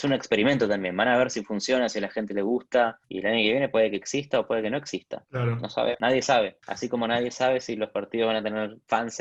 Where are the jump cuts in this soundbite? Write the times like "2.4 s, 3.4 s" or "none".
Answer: none